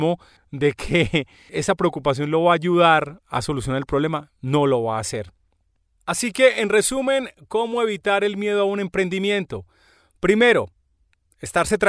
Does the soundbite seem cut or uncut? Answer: uncut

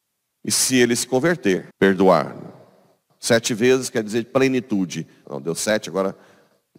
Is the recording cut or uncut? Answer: cut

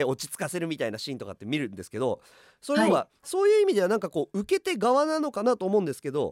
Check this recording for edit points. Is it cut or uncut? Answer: uncut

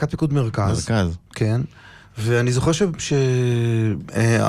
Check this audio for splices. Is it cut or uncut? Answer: uncut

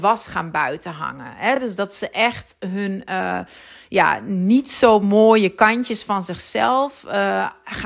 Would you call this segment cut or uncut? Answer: uncut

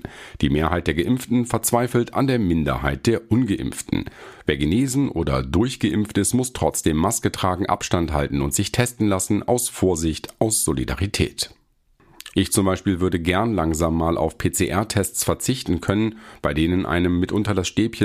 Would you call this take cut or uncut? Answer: cut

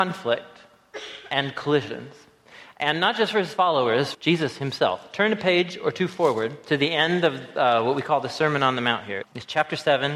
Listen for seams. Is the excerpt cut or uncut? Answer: cut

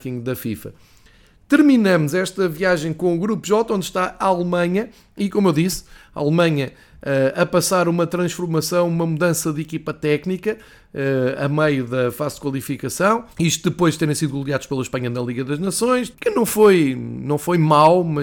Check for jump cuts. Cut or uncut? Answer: cut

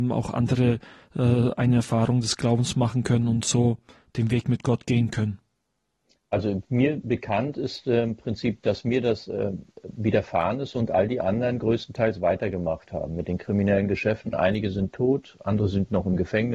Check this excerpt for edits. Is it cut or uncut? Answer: uncut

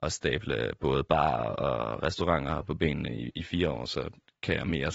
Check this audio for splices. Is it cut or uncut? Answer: uncut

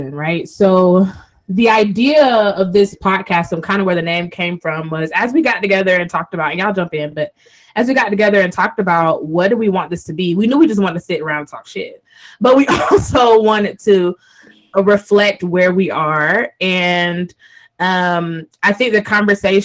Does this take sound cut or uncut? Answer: uncut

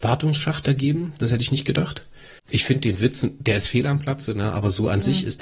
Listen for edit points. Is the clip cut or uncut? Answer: cut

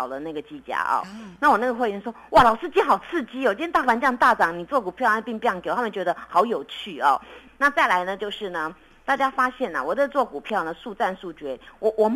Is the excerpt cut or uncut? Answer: cut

